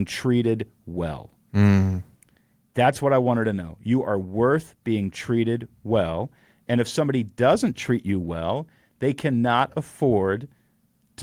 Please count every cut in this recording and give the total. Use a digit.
0